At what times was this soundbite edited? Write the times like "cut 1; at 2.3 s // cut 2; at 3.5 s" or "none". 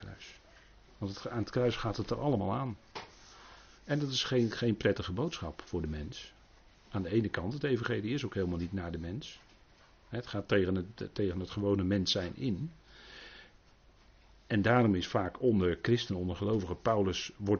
none